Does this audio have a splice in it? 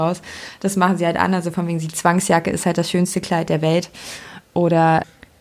no; 0 cuts

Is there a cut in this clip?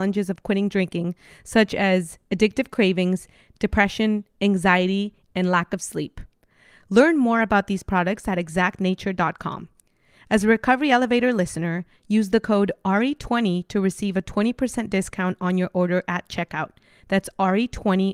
no; 0 cuts

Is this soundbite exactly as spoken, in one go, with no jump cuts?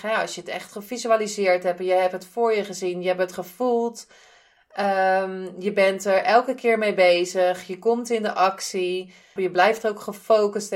no; 1 cut; at 9.4 s

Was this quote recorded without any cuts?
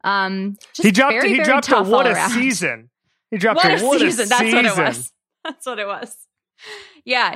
yes; 0 cuts

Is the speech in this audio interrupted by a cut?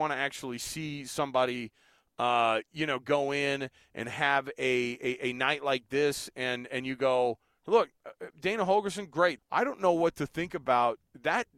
yes; 1 cut; at 9.4 s

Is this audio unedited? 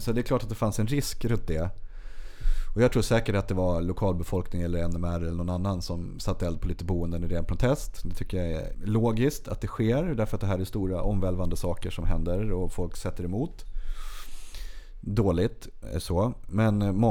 no; 1 cut; at 8.7 s

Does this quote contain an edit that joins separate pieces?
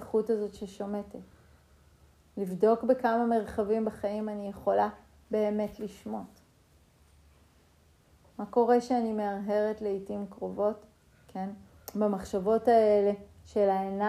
no; 0 cuts

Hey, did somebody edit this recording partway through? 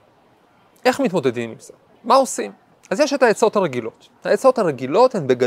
yes; 1 cut; at 2.0 s

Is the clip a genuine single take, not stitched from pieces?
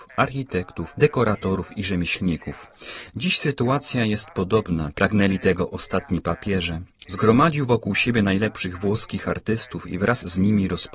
no; 2 cuts; at 4.9 s, 7.0 s

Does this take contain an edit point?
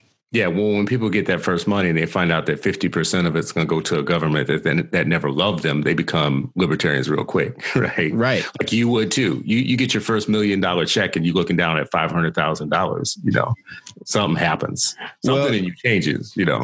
no; 0 cuts

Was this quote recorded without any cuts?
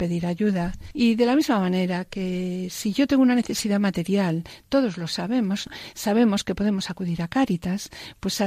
yes; 0 cuts

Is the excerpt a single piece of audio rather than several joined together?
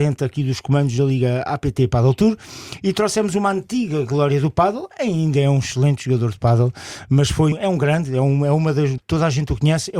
no; 2 cuts; at 7.5 s, 9.0 s

